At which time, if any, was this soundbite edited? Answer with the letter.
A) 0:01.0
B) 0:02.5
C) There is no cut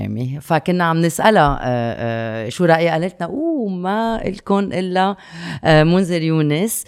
B